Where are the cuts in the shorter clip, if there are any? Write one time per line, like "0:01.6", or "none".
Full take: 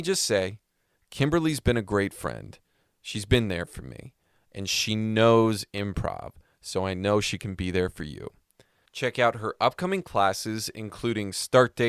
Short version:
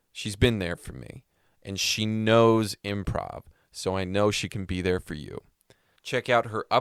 none